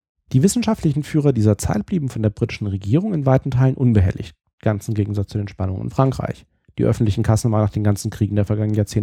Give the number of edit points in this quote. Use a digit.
1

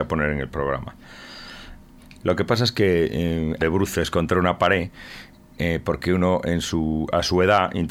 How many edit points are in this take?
2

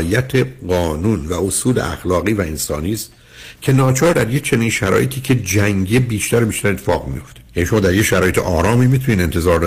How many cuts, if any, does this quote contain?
1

